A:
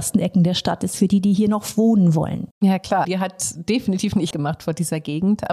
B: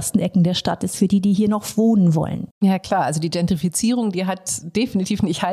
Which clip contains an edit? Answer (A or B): A